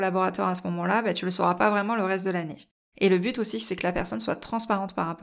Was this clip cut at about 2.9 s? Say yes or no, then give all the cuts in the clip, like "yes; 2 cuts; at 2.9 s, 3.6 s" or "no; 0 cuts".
yes; 1 cut; at 2.9 s